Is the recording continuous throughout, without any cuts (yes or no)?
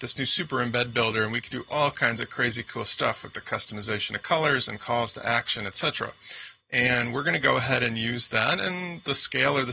no